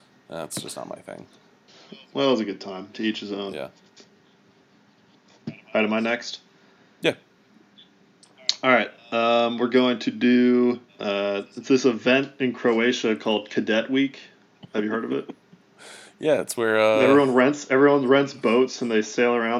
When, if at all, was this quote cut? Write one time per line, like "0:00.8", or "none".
0:02.9
0:10.9